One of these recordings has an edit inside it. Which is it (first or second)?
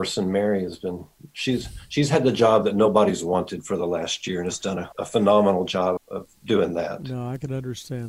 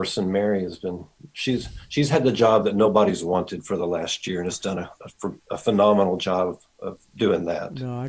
first